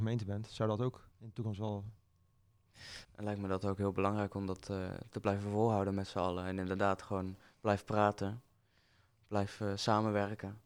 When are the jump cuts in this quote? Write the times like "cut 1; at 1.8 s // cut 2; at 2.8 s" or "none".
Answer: cut 1; at 1.1 s // cut 2; at 3.0 s